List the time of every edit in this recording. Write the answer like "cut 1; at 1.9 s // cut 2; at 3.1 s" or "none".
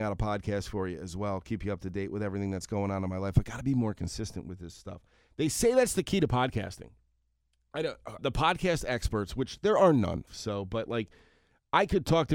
cut 1; at 8.2 s // cut 2; at 10.3 s